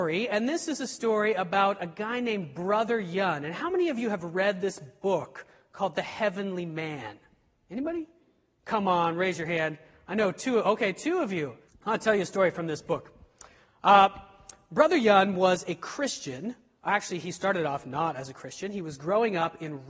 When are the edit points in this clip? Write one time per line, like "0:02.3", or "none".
0:11.7